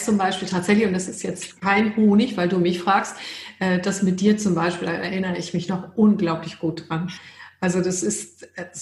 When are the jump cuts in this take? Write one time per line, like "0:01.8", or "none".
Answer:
none